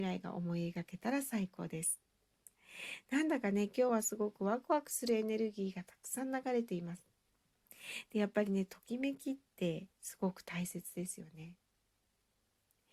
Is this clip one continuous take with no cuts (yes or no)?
no